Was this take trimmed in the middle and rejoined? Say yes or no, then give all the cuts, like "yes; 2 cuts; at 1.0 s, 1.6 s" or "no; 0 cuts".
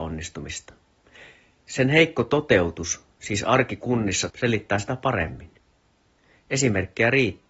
yes; 1 cut; at 4.3 s